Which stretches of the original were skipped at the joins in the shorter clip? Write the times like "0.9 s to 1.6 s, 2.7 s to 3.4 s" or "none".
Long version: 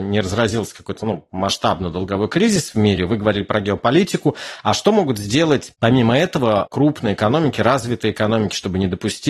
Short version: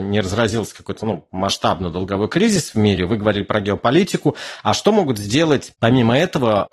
none